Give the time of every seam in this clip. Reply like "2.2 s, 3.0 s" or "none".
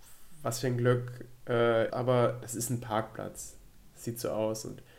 1.9 s